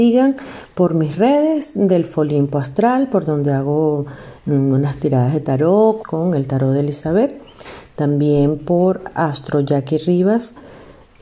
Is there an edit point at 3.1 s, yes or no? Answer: no